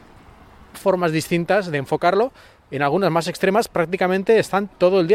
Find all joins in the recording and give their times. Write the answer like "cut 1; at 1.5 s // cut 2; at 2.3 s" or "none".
none